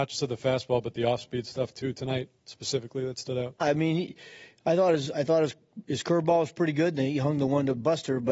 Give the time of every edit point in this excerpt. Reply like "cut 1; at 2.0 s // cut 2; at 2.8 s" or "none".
cut 1; at 3.6 s